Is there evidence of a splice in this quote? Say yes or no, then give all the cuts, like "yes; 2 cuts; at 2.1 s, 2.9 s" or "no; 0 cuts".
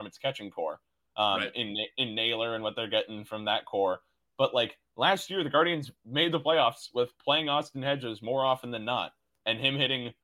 no; 0 cuts